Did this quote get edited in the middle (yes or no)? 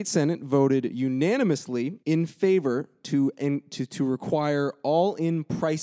yes